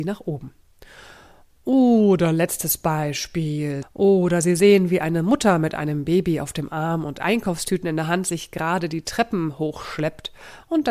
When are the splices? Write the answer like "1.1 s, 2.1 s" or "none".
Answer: 3.8 s